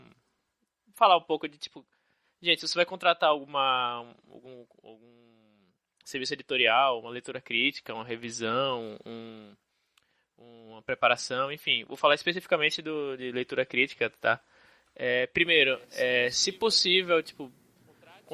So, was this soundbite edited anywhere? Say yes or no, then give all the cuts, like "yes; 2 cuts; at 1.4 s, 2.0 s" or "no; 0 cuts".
no; 0 cuts